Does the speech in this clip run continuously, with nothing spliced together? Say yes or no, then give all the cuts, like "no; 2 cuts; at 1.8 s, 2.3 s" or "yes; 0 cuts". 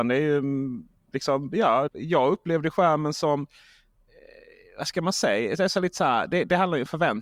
no; 1 cut; at 1.9 s